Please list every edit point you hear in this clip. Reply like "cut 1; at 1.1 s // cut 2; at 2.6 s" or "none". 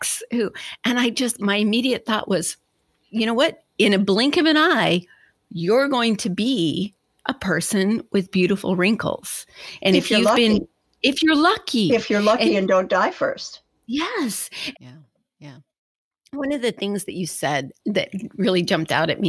cut 1; at 14.7 s // cut 2; at 17.8 s